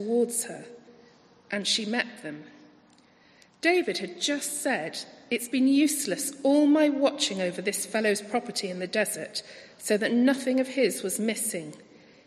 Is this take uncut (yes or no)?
yes